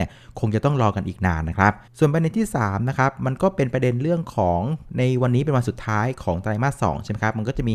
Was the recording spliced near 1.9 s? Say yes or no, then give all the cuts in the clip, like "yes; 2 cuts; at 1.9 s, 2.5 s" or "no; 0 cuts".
yes; 1 cut; at 1.9 s